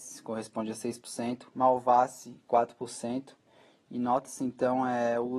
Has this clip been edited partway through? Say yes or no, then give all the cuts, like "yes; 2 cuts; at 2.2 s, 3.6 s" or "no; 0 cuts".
yes; 1 cut; at 1.5 s